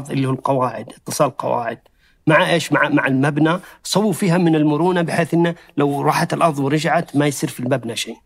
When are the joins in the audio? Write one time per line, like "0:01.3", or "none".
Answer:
none